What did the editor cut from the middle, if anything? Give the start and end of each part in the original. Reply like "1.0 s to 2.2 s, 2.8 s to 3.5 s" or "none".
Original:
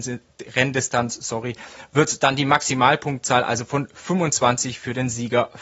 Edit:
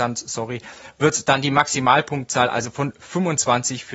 none